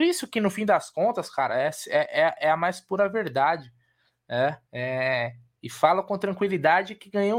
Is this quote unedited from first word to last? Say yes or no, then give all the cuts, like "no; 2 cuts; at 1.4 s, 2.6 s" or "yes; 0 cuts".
yes; 0 cuts